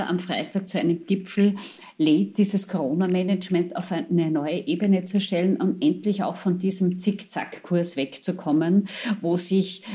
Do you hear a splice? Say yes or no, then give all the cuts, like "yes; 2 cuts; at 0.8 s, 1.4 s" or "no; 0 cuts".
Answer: no; 0 cuts